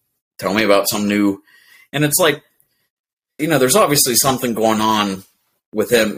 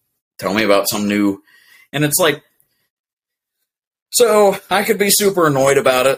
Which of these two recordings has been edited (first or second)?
first